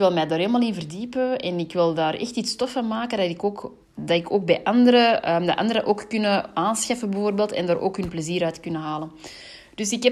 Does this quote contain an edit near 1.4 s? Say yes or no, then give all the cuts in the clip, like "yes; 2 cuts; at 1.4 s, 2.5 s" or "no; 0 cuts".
no; 1 cut; at 3.8 s